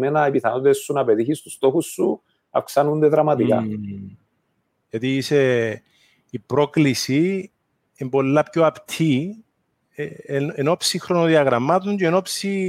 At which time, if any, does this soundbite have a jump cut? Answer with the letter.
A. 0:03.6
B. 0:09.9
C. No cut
C